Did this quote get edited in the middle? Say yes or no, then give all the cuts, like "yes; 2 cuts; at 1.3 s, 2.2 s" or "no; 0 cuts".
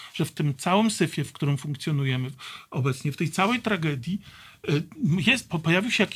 no; 0 cuts